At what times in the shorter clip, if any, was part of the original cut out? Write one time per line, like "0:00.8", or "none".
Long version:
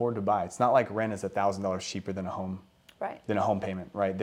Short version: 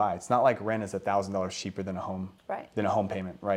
0:02.4